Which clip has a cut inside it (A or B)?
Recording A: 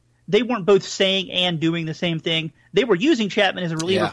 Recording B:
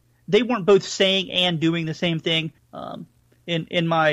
B